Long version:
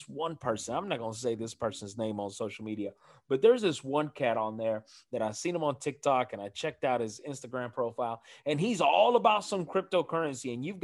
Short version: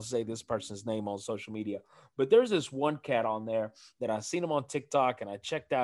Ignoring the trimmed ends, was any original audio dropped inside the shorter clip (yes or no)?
no